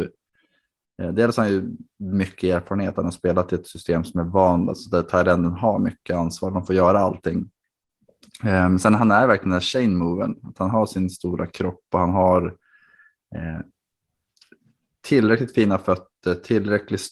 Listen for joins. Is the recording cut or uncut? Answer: uncut